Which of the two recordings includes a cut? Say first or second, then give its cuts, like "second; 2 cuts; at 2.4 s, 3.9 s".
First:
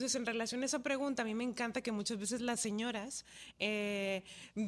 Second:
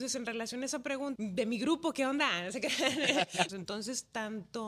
second; 2 cuts; at 1.2 s, 3.5 s